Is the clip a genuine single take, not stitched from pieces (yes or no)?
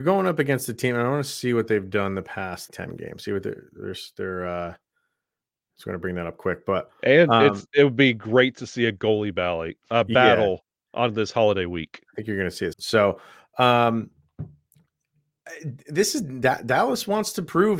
no